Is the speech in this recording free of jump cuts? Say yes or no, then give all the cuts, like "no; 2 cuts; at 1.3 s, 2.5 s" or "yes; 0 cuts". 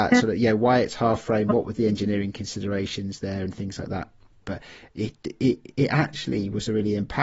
no; 1 cut; at 4.4 s